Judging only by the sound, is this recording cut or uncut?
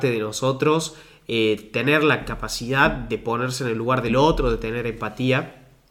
uncut